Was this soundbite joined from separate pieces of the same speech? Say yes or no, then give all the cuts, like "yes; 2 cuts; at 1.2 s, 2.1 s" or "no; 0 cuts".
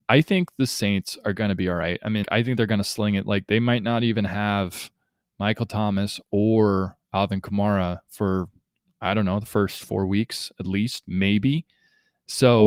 yes; 1 cut; at 2.2 s